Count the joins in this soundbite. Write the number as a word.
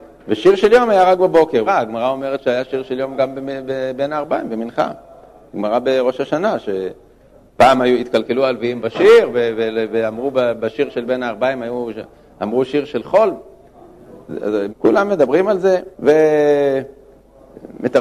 three